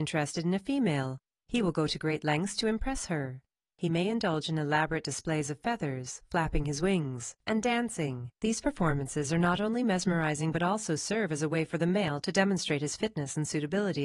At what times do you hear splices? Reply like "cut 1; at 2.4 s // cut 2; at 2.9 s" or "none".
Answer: none